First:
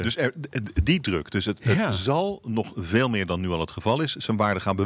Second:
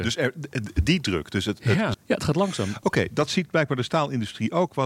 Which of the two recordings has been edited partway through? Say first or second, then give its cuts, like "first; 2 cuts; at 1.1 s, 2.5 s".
second; 1 cut; at 1.9 s